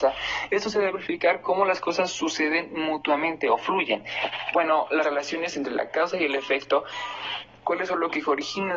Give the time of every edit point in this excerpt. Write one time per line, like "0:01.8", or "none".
0:04.5
0:07.6